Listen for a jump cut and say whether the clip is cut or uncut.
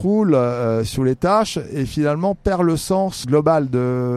cut